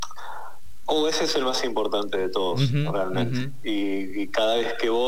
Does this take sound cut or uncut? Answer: uncut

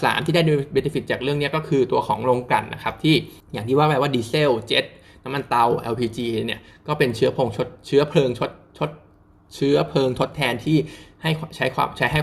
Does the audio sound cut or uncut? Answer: cut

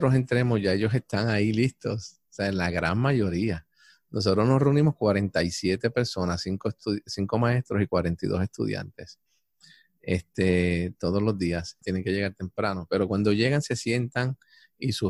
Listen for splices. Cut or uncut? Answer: cut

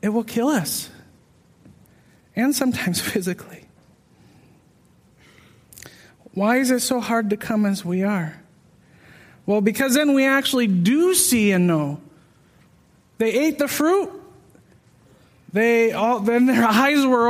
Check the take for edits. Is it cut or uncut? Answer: uncut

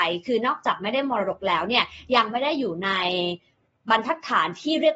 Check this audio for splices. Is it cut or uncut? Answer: uncut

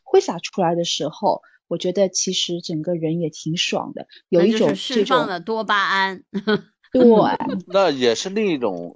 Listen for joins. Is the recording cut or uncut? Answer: uncut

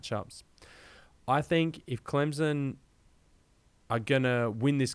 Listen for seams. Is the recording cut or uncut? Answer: uncut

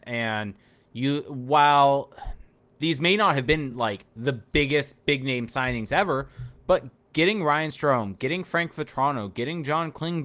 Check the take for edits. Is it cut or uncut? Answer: uncut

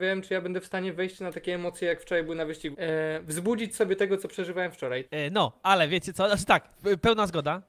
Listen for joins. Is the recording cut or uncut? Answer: cut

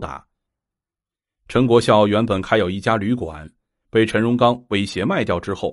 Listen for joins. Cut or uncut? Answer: uncut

